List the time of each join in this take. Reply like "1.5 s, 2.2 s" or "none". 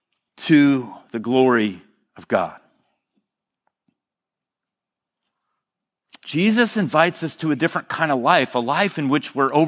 6.2 s